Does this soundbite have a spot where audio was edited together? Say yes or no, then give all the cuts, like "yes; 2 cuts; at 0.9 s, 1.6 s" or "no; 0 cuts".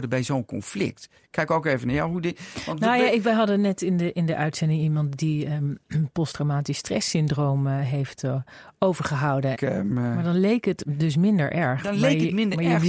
yes; 1 cut; at 9.5 s